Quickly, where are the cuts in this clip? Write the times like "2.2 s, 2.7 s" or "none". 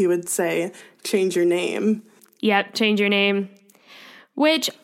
none